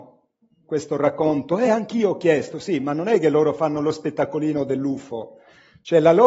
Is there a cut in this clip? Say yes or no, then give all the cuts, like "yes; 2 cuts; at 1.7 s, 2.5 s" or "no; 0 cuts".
no; 0 cuts